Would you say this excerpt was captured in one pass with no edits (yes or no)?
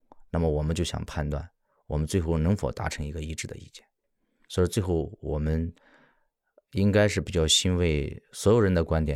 yes